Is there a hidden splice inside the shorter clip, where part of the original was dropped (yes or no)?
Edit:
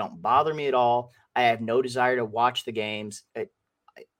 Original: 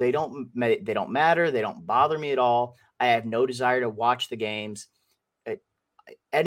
yes